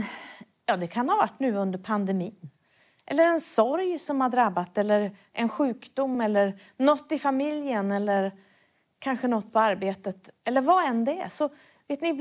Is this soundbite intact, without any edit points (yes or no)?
yes